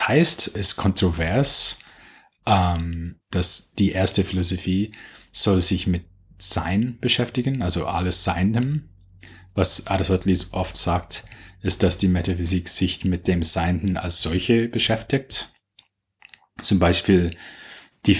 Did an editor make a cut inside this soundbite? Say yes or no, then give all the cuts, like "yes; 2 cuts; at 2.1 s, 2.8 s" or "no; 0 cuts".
yes; 1 cut; at 3.3 s